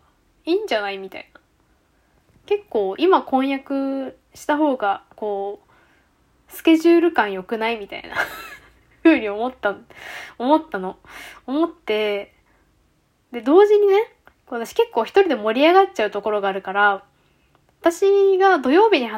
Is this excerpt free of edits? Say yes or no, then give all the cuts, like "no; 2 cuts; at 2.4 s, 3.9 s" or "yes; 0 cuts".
yes; 0 cuts